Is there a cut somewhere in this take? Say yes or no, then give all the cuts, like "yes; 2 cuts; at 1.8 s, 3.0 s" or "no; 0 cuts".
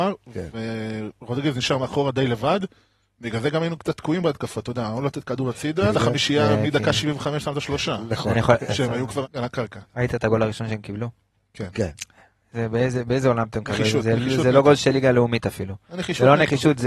yes; 2 cuts; at 5.9 s, 9.2 s